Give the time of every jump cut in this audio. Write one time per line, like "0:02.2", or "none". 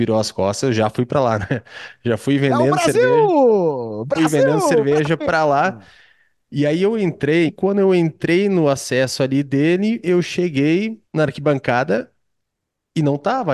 0:07.5
0:11.1